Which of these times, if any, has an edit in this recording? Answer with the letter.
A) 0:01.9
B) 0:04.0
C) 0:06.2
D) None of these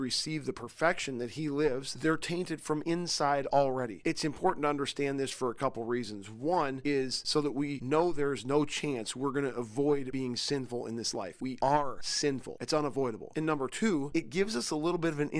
A